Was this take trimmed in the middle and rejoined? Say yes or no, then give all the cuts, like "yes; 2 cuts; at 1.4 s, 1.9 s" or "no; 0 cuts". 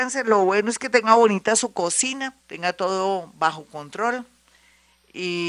yes; 1 cut; at 2.4 s